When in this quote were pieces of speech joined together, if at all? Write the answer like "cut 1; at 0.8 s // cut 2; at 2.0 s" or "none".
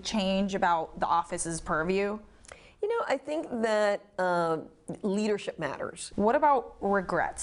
cut 1; at 6.1 s